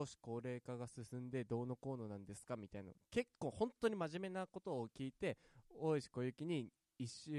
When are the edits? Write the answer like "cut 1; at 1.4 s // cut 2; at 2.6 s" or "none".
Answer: none